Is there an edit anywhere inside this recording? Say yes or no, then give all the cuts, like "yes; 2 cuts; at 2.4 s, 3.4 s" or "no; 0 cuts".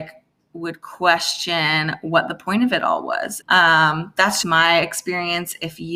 yes; 2 cuts; at 3.4 s, 4.4 s